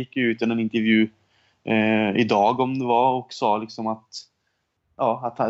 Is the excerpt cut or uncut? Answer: uncut